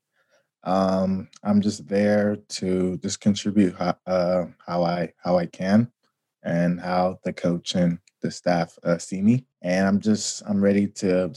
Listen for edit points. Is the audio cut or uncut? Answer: cut